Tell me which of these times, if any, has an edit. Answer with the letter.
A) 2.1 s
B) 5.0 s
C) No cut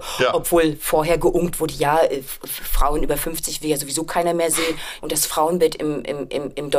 B